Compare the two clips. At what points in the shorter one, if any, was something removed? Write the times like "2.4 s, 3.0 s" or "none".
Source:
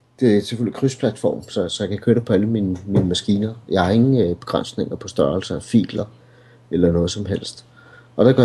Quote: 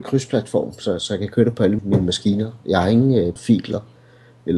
1.8 s, 3.4 s